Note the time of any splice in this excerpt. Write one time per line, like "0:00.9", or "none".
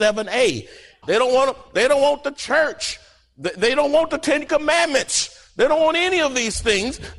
0:01.0